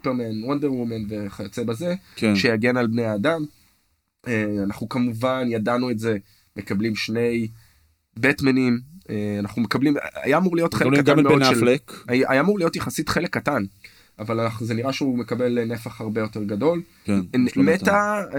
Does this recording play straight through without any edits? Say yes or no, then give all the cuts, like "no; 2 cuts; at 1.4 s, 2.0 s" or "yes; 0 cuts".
no; 2 cuts; at 12.1 s, 17.0 s